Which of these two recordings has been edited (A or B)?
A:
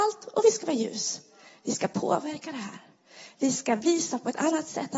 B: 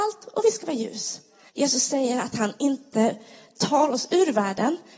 B